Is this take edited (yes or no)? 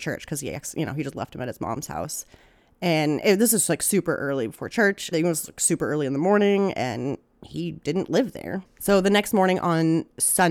yes